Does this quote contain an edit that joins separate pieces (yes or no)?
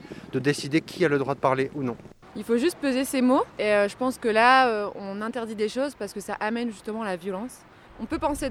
yes